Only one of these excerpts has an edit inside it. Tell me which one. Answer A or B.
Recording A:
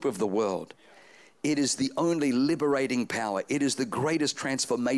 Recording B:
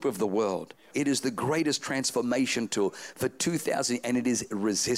B